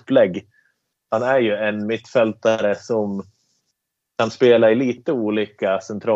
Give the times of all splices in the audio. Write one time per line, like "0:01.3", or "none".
none